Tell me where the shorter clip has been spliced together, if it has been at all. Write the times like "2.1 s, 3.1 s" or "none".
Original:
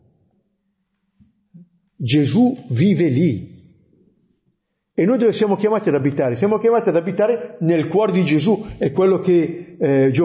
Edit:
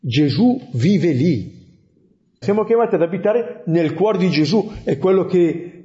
2.4 s